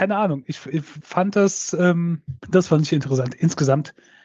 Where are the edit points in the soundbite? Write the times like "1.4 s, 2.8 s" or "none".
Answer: 2.4 s